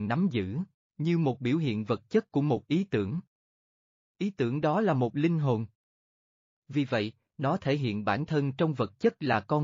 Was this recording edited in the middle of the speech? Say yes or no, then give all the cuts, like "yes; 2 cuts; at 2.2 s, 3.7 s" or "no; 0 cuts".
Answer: no; 0 cuts